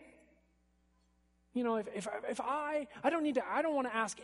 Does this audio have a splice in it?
no; 0 cuts

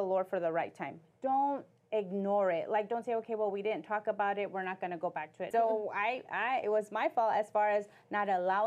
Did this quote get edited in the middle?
yes; 1 cut; at 5.5 s

